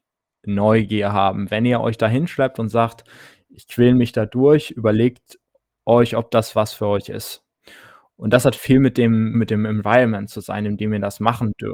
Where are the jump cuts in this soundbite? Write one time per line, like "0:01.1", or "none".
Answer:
0:09.3